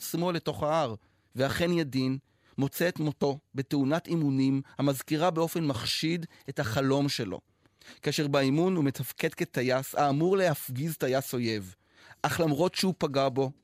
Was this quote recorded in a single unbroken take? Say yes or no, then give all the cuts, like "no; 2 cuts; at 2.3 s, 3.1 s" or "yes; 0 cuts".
no; 1 cut; at 1.3 s